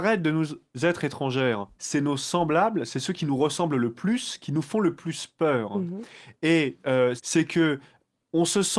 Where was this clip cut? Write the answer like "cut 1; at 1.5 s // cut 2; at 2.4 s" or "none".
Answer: cut 1; at 1.8 s // cut 2; at 7.2 s